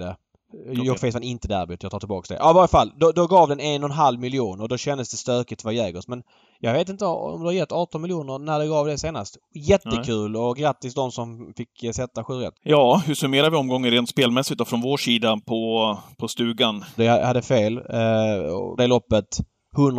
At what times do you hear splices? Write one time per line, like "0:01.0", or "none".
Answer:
0:12.6
0:17.0
0:18.8